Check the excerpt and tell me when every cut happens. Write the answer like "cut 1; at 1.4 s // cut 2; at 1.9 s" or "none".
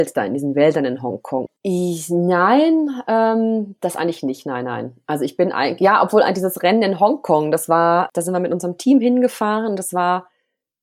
cut 1; at 1.5 s